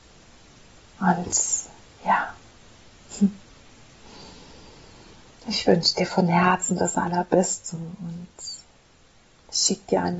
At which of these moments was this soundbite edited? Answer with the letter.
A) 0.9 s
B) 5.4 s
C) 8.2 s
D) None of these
D